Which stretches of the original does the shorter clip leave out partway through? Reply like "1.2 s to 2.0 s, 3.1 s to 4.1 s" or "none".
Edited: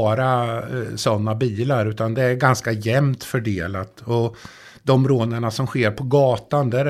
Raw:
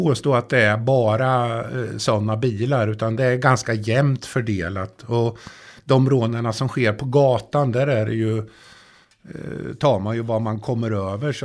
none